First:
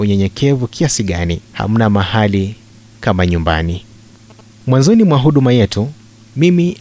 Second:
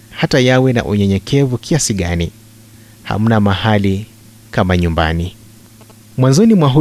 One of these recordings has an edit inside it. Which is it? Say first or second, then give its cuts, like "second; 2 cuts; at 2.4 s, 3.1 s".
first; 1 cut; at 1.4 s